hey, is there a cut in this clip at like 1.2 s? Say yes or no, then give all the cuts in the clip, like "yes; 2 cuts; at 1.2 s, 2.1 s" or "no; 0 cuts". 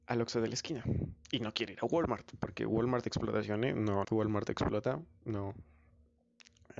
no; 1 cut; at 4.0 s